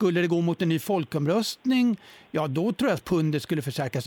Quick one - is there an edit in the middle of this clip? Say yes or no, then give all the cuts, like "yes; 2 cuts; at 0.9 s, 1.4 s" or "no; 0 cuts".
no; 0 cuts